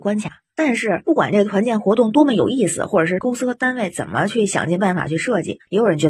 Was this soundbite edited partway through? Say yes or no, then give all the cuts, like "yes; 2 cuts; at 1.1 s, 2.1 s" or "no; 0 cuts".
no; 0 cuts